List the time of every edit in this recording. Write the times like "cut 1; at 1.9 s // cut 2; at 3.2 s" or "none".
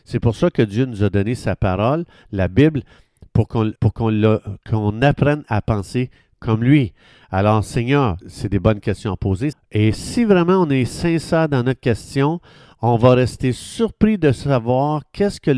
cut 1; at 3.7 s // cut 2; at 8.2 s // cut 3; at 9.5 s